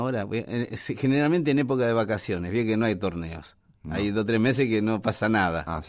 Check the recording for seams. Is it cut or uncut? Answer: uncut